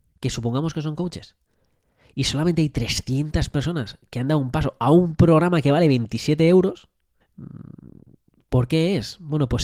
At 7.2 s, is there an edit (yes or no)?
yes